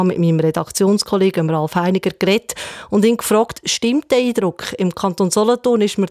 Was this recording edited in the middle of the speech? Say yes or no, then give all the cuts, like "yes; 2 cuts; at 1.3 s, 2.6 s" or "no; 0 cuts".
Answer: no; 0 cuts